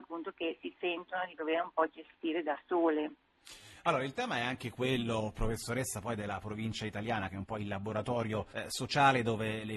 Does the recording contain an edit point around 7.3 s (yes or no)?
no